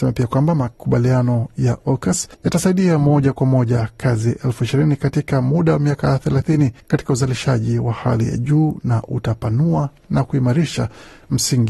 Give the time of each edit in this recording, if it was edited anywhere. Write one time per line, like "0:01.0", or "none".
0:02.3
0:06.8